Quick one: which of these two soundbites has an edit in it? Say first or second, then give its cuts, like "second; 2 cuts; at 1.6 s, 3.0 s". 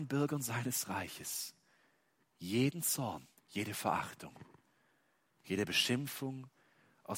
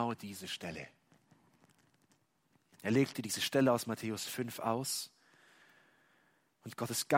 first; 1 cut; at 3.4 s